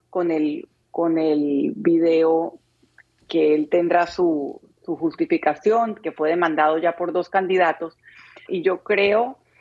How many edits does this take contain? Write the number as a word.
one